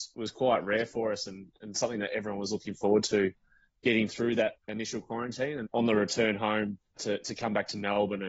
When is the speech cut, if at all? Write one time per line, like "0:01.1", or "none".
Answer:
0:05.6
0:07.0